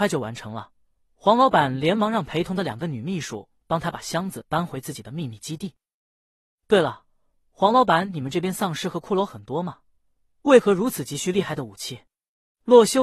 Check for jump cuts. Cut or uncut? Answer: uncut